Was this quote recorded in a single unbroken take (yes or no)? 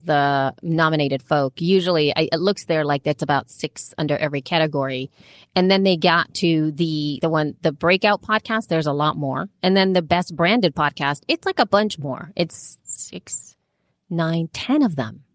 no